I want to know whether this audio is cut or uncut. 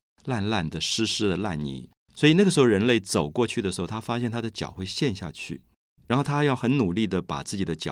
uncut